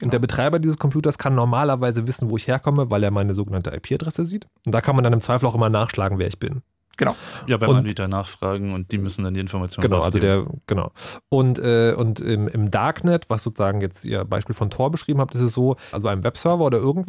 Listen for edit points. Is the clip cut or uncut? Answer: cut